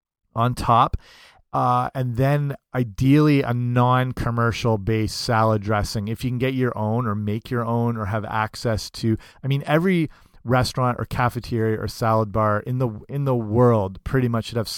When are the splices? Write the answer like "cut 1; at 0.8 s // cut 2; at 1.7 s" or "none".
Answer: none